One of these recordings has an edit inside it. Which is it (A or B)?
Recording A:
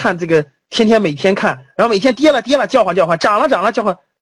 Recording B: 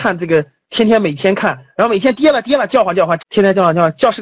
B